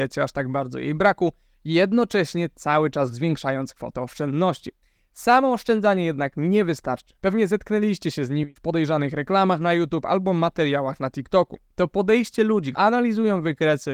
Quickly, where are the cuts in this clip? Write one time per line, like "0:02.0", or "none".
0:07.2
0:12.7